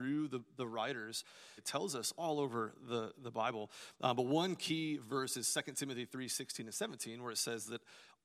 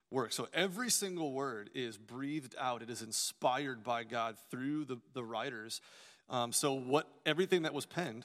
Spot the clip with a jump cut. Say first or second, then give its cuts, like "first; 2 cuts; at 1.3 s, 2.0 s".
first; 1 cut; at 1.6 s